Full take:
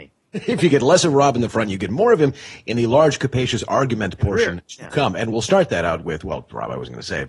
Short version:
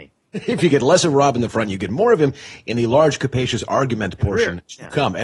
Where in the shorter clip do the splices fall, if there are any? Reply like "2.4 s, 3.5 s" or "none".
none